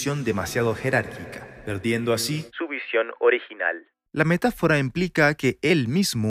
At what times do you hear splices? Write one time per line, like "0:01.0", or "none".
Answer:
0:04.1